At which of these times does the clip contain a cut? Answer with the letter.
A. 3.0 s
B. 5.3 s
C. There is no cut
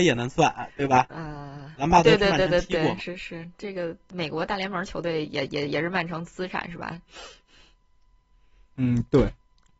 A